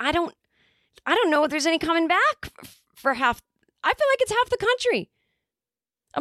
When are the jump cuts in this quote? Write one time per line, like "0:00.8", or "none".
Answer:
none